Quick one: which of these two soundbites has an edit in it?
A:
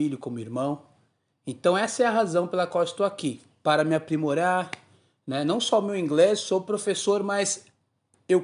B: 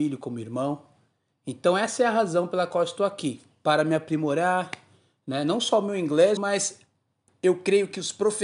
B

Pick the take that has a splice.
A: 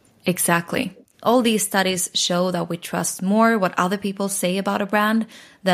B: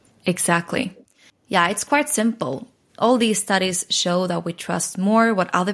A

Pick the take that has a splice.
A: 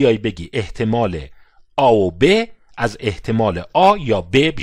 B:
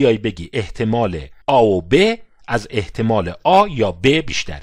B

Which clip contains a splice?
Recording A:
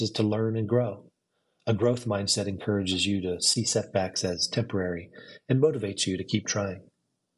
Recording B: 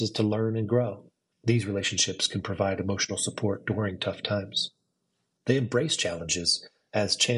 B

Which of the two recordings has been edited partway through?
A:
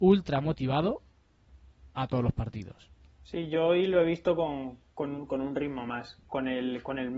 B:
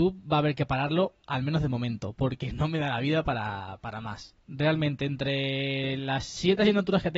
A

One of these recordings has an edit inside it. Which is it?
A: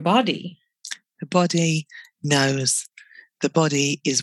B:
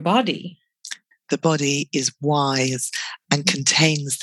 B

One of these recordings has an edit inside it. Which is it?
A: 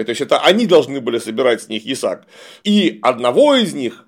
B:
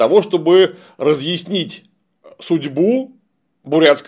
A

